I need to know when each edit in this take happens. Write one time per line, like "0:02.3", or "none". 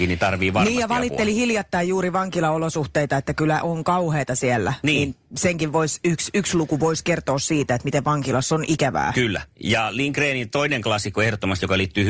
none